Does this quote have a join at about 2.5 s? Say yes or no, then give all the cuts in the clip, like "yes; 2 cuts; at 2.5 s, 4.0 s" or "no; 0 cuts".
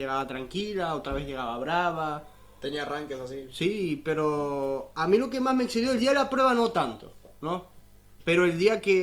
no; 0 cuts